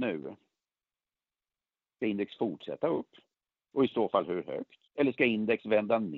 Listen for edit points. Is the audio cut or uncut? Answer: cut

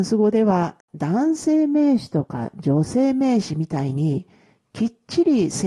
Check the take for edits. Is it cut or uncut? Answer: uncut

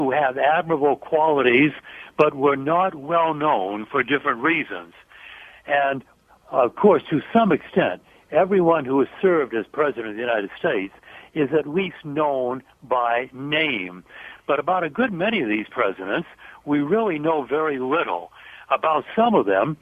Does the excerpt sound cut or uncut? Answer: uncut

